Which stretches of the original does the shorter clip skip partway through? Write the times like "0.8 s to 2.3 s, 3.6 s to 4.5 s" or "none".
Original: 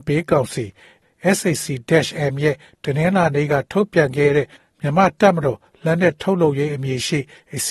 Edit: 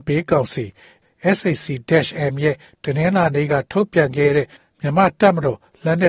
none